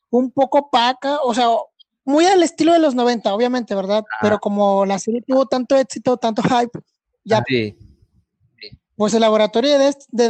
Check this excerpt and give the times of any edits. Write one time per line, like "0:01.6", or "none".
0:07.4